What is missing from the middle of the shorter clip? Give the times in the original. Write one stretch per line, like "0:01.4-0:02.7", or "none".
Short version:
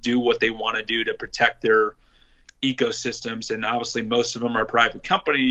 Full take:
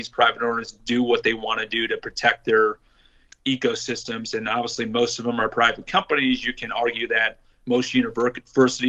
none